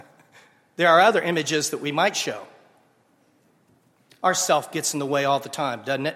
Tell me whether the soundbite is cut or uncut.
uncut